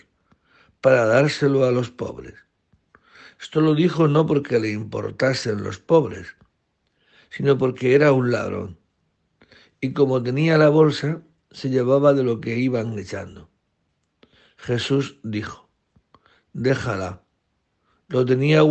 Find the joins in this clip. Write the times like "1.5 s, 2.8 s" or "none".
none